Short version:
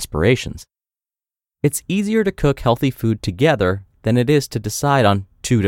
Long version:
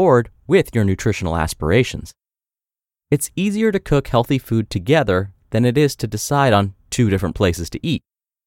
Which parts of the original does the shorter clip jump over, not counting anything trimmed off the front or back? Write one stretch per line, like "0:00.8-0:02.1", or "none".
none